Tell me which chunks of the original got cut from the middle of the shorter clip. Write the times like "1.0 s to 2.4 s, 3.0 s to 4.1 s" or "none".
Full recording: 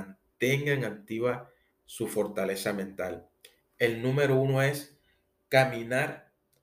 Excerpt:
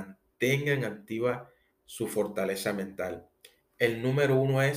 none

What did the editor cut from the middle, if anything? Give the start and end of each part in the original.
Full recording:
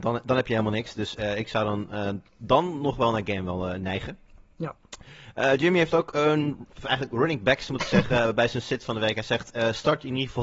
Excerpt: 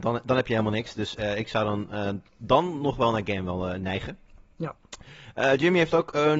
none

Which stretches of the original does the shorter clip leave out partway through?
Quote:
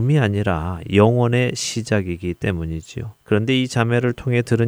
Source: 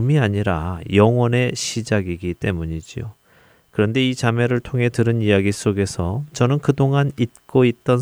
3.2 s to 3.7 s

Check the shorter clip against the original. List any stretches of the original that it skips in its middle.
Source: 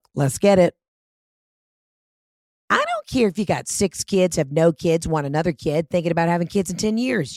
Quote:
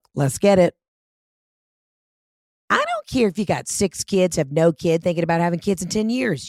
5.0 s to 5.9 s

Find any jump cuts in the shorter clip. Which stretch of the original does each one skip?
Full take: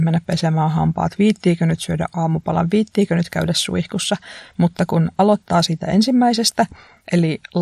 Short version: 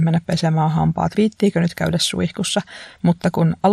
1.1 s to 2.7 s

